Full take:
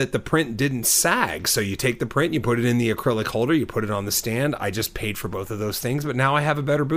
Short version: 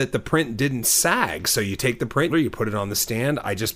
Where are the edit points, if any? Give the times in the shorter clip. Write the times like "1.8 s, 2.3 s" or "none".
2.3 s